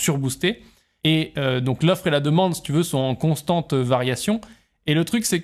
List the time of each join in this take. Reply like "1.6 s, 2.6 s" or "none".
1.0 s